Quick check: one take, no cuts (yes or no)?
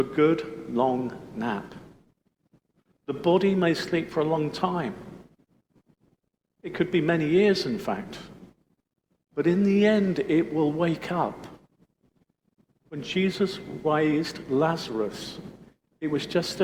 yes